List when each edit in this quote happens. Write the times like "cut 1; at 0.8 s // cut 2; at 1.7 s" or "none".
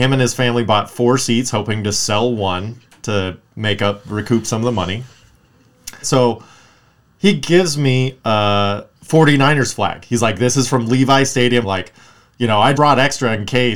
cut 1; at 6.0 s // cut 2; at 11.6 s // cut 3; at 12.7 s